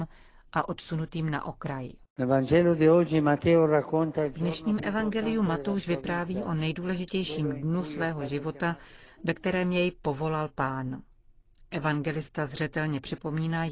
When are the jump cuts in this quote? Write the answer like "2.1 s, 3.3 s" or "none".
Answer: none